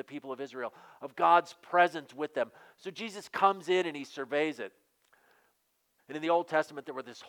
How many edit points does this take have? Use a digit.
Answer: 1